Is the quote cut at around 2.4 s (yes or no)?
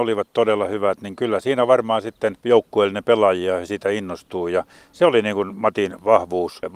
yes